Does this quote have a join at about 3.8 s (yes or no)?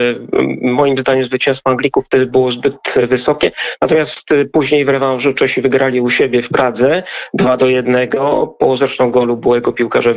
no